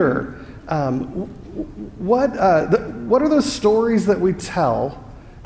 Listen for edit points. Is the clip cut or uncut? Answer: uncut